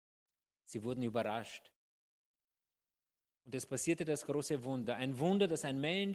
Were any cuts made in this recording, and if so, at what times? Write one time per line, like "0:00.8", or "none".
none